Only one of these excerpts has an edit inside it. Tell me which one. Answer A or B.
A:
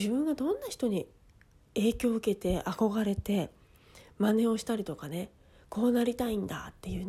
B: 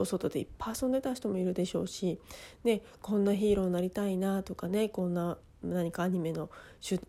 B